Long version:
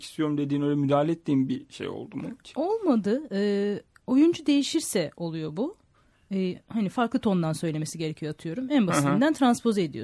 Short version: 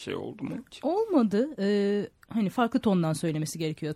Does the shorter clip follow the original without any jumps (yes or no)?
no